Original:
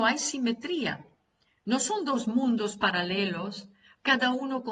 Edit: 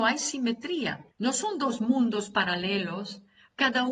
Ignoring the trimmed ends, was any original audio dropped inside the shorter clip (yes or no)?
yes